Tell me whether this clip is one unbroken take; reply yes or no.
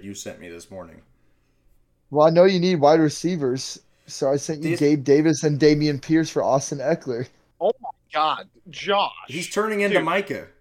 yes